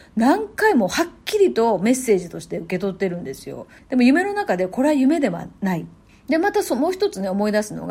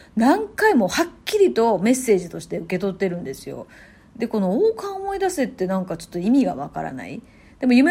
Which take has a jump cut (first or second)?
first